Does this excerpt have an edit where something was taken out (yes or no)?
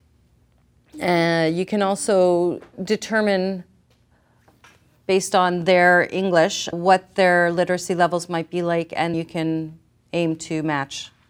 yes